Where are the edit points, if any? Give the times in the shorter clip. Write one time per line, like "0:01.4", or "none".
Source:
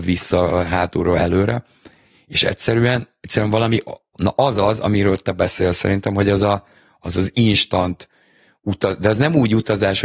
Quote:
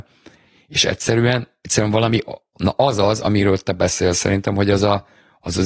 none